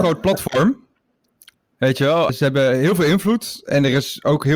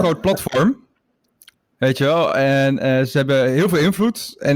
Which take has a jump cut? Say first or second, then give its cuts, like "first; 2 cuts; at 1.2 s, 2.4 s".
first; 1 cut; at 2.3 s